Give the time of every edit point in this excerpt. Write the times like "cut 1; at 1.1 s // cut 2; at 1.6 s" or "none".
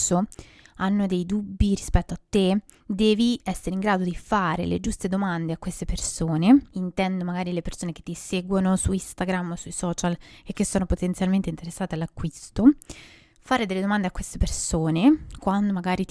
none